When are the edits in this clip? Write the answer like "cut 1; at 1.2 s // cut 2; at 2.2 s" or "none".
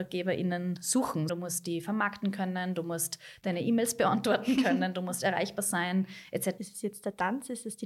cut 1; at 1.3 s // cut 2; at 6.6 s